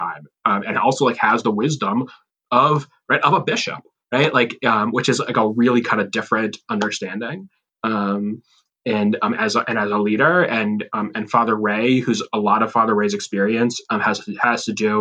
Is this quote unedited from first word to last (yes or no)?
yes